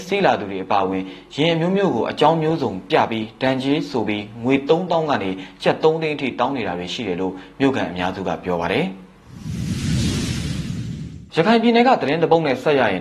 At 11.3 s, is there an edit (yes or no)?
yes